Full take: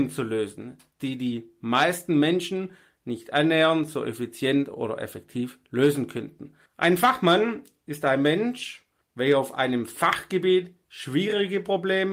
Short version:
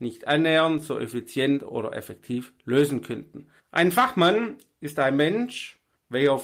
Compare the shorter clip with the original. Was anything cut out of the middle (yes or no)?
no